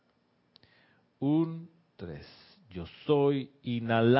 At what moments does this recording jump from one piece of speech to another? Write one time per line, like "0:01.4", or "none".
0:01.9